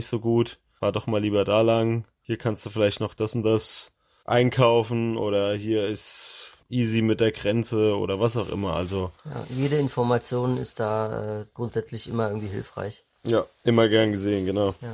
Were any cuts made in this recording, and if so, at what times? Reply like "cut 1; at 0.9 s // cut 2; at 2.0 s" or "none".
none